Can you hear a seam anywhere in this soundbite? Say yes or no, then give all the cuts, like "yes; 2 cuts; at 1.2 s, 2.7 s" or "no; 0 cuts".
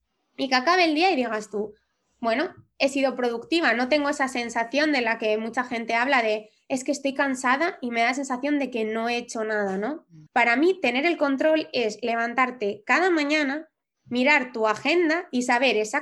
yes; 1 cut; at 10.3 s